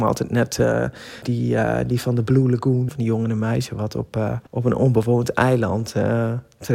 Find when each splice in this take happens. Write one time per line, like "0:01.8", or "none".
0:01.2
0:02.9
0:04.5